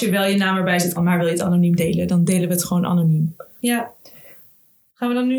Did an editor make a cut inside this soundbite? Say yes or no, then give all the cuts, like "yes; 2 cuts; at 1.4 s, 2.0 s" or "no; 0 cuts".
yes; 2 cuts; at 1.0 s, 3.6 s